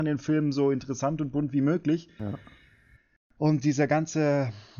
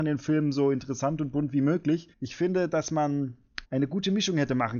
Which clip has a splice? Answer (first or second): second